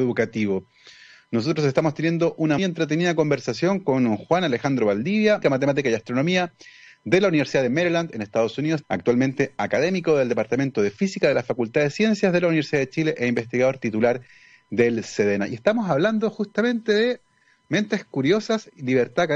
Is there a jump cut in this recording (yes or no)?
yes